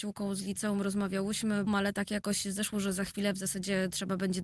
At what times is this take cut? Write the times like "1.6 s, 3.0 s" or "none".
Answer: 1.7 s